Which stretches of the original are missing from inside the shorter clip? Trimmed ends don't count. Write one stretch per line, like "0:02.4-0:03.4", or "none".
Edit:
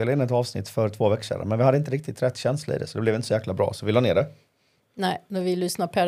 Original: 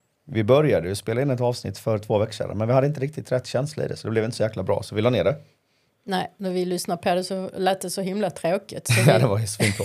none